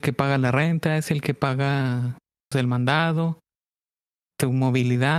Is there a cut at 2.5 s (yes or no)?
yes